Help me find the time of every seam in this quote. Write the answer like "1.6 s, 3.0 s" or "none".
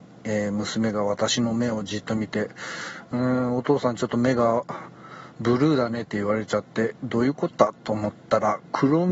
none